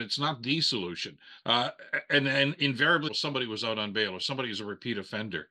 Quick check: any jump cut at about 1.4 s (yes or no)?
yes